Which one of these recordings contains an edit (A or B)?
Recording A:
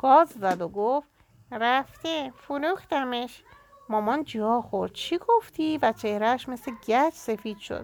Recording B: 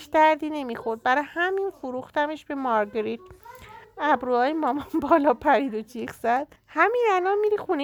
B